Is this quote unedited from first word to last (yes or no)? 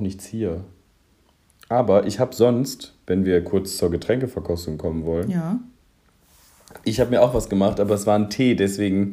yes